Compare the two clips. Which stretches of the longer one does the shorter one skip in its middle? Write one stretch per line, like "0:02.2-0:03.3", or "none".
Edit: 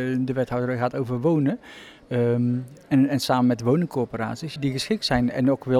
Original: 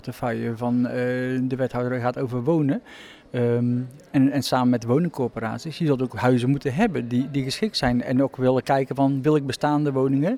0:05.8-0:07.3